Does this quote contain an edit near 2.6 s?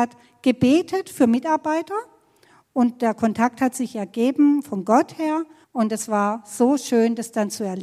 no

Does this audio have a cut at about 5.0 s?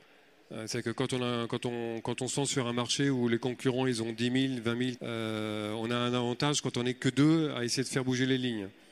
yes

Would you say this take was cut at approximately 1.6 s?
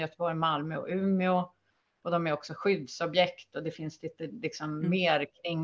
no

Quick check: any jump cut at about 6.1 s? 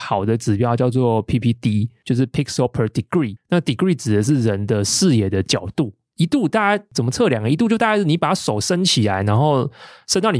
no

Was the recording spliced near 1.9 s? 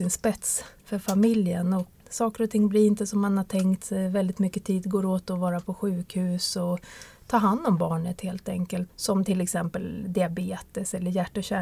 yes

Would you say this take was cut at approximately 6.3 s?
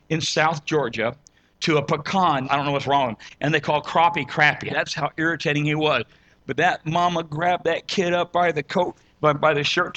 no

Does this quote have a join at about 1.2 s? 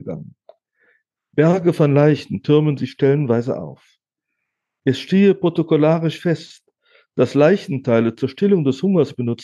yes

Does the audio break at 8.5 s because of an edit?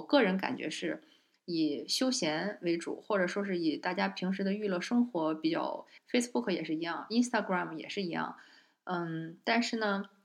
no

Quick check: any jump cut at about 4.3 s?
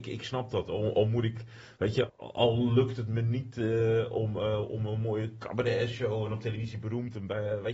no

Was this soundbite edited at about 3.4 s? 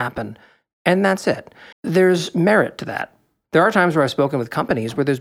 no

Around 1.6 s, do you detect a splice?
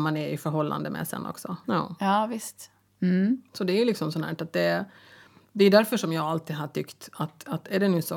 yes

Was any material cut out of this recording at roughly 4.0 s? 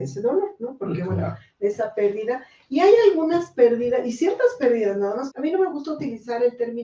no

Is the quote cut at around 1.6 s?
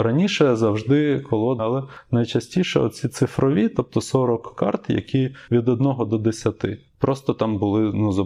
yes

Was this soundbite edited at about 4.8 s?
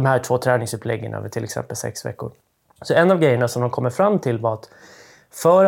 no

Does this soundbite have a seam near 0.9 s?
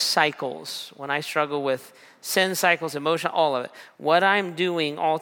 no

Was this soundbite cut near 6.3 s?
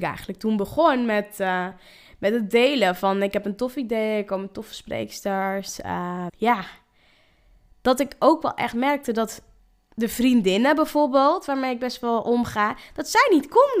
yes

